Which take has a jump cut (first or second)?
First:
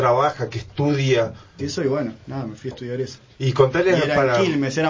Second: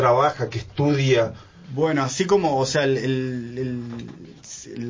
first